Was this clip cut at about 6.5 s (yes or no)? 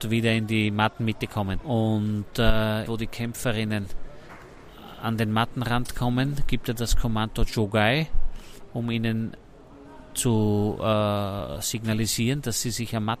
no